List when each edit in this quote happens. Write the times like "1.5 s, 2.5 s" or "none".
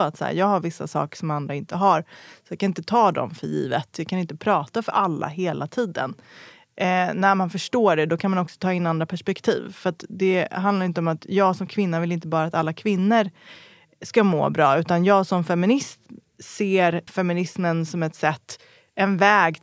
17.1 s